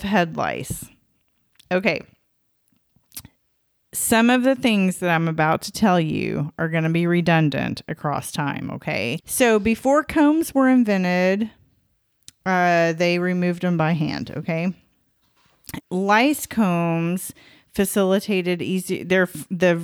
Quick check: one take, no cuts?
no; 2 cuts; at 9.2 s, 15.8 s

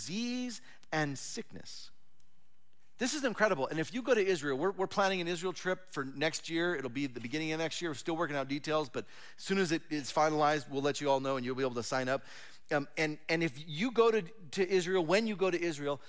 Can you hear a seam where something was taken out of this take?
no; 0 cuts

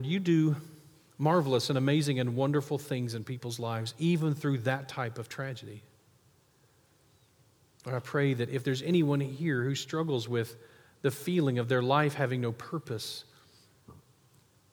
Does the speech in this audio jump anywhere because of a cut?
no; 0 cuts

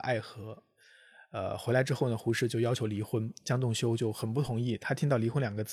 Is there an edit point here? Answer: no; 0 cuts

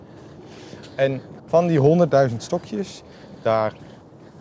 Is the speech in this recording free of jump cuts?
no; 1 cut; at 1.4 s

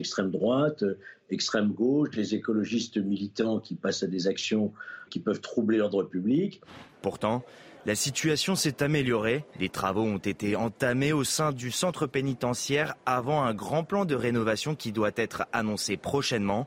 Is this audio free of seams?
no; 3 cuts; at 5.1 s, 6.9 s, 9.5 s

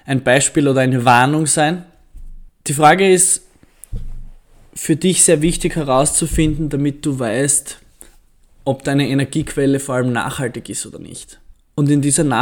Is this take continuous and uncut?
no; 1 cut; at 2.5 s

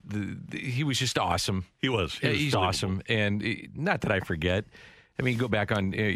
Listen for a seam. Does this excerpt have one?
yes; 1 cut; at 2.5 s

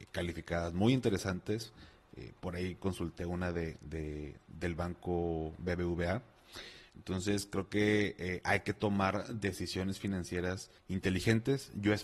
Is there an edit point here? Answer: yes; 2 cuts; at 6.9 s, 10.8 s

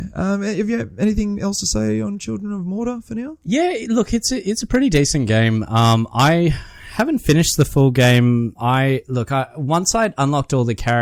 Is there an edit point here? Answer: no; 0 cuts

